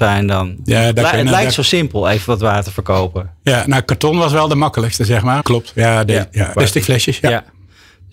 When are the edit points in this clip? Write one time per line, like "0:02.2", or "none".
0:05.4
0:06.5